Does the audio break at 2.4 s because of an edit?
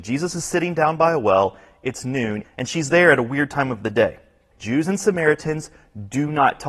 yes; 2 cuts; at 2.4 s, 4.5 s

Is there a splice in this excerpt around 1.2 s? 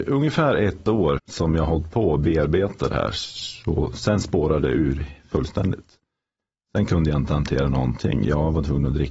yes; 1 cut; at 1.2 s

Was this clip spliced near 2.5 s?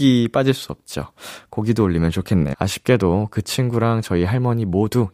yes; 1 cut; at 2.5 s

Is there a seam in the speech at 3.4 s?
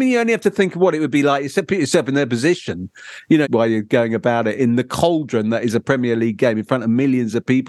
yes; 2 cuts; at 3.4 s, 4.6 s

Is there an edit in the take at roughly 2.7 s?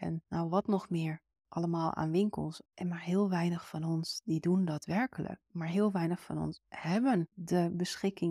yes; 1 cut; at 2.7 s

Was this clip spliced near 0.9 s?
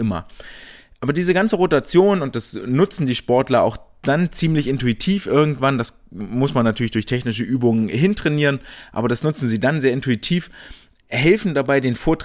no; 0 cuts

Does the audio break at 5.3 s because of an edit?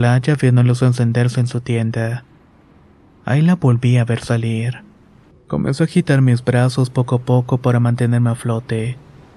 yes; 1 cut; at 5.3 s

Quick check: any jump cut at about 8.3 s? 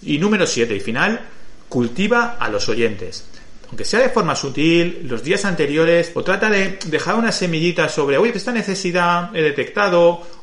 yes; 2 cuts; at 6.1 s, 8.3 s

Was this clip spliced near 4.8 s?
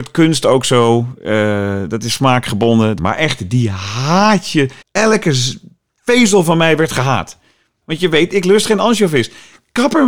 yes; 3 cuts; at 3.0 s, 4.8 s, 7.8 s

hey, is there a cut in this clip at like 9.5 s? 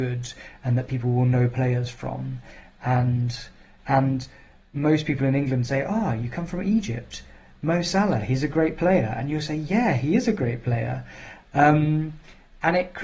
no; 1 cut; at 3.8 s

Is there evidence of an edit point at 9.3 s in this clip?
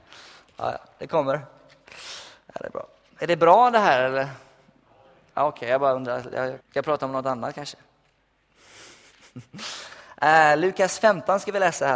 no; 1 cut; at 6.6 s

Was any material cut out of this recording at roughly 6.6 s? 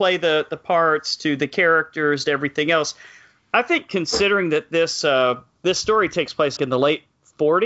yes; 1 cut; at 6.6 s

